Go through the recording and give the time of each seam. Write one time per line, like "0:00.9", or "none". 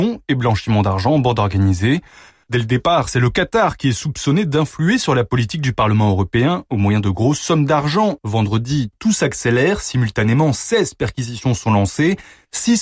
none